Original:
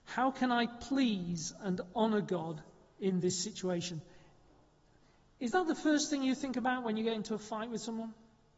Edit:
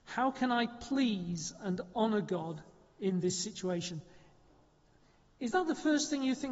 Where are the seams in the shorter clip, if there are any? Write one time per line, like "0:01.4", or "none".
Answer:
none